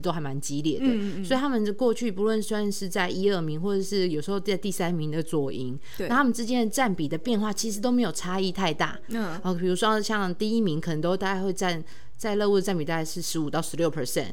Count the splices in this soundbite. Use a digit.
0